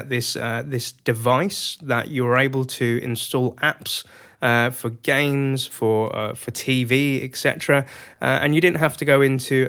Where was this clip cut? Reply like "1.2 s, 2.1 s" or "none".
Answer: none